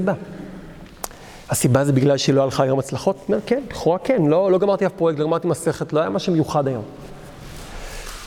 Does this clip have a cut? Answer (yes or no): no